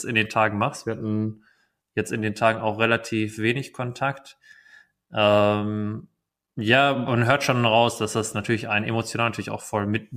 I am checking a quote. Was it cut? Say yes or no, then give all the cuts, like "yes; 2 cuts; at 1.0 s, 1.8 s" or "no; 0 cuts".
no; 0 cuts